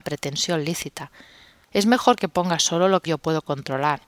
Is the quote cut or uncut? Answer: cut